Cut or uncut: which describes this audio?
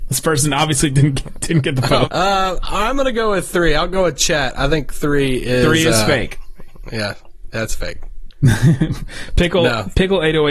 cut